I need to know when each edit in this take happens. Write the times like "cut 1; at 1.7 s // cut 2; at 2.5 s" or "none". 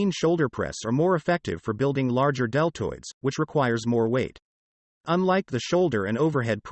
cut 1; at 4.8 s